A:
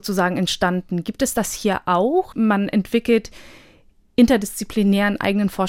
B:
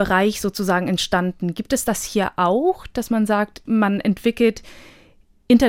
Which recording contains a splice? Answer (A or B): A